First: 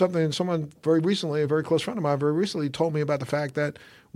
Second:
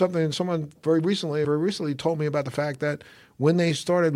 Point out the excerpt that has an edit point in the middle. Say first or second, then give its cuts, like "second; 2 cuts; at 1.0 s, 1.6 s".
second; 1 cut; at 1.4 s